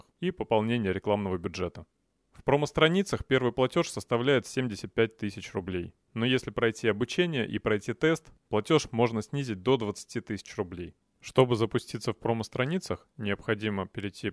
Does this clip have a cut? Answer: no; 0 cuts

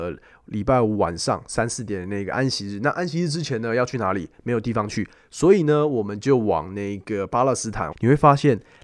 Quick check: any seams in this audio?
yes; 1 cut; at 7.9 s

